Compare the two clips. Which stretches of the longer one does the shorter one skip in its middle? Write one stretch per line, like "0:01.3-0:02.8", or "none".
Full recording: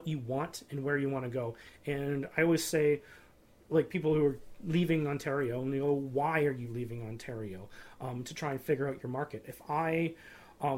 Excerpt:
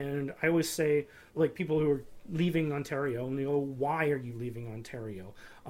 0:03.2-0:03.6